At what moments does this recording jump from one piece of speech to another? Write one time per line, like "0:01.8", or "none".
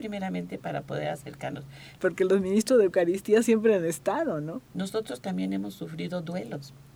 0:02.0
0:04.7